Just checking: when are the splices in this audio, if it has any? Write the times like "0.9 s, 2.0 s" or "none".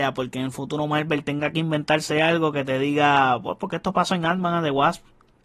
none